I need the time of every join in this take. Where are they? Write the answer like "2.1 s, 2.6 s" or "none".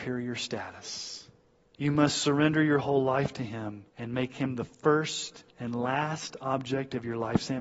1.7 s, 3.9 s, 5.5 s